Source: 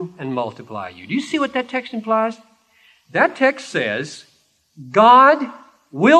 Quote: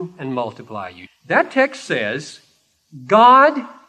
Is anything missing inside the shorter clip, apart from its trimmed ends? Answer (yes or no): yes